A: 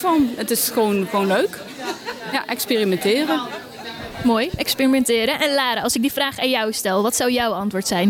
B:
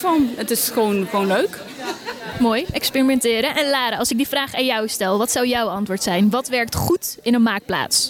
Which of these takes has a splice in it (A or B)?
B